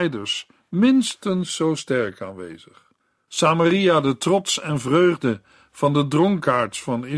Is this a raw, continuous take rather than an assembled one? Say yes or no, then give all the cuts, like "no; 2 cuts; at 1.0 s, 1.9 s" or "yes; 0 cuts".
no; 1 cut; at 3.3 s